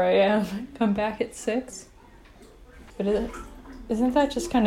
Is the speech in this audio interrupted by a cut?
yes; 1 cut; at 2.9 s

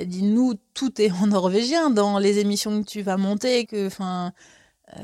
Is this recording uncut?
no; 1 cut; at 3.7 s

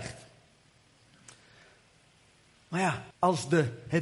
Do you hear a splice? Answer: yes; 1 cut; at 3.1 s

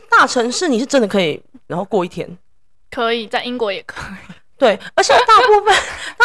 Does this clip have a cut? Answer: yes; 1 cut; at 1.7 s

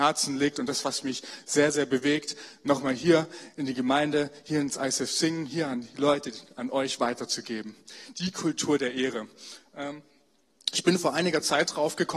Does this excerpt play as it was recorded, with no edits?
yes; 0 cuts

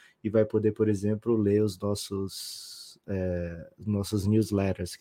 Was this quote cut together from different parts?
no; 0 cuts

